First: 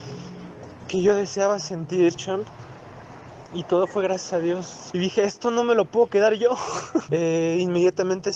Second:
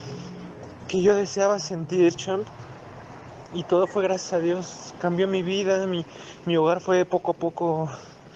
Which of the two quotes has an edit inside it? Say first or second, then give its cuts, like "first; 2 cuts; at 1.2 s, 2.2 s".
first; 2 cuts; at 4.9 s, 7.1 s